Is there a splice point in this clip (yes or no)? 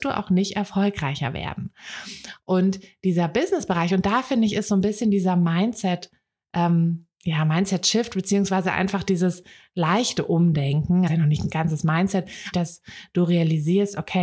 yes